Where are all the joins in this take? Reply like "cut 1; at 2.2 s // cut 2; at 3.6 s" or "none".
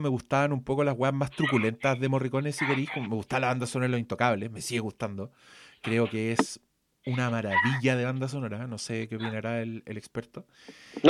none